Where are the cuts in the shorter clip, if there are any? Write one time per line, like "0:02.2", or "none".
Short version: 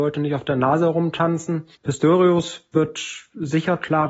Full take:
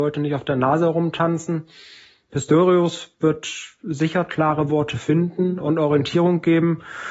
0:01.8